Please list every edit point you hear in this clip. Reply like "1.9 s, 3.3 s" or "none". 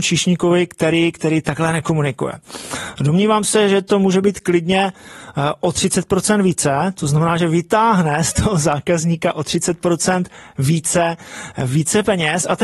none